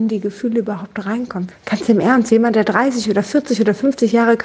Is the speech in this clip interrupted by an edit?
yes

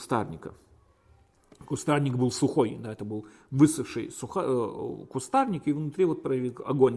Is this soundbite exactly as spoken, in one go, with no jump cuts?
yes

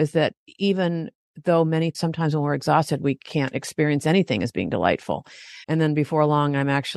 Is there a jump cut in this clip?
yes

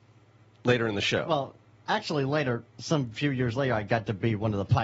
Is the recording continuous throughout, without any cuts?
yes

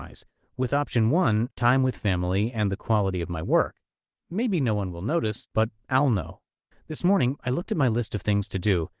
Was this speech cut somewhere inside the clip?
yes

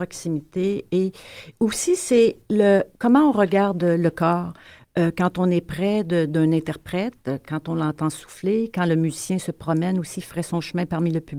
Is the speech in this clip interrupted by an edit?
no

